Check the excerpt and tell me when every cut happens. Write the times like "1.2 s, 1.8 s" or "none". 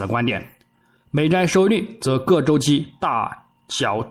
none

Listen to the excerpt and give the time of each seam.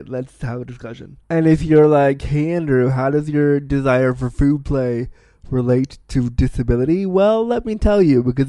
1.2 s

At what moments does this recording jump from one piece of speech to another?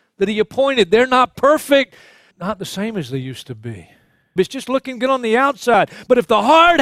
2.3 s, 4.4 s

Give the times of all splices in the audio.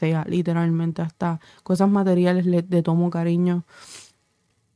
none

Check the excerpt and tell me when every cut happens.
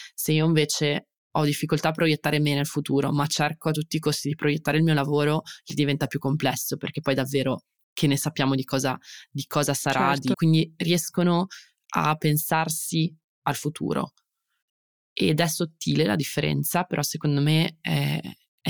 10.3 s

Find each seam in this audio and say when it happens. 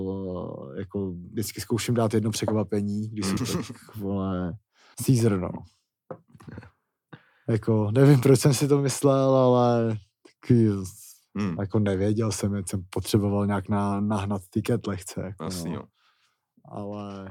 3.4 s, 4.9 s

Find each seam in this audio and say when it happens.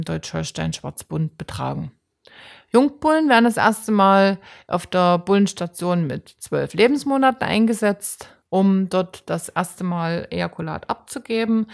none

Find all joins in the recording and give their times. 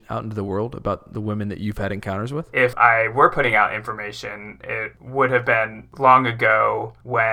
none

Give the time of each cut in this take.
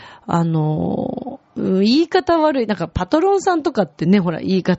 1.5 s

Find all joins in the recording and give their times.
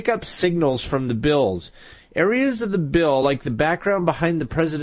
none

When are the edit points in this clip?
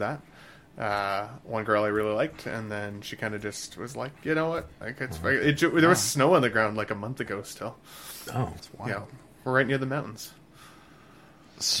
4.8 s, 8.6 s

